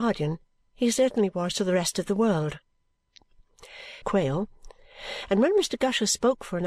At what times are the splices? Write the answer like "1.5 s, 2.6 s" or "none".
4.0 s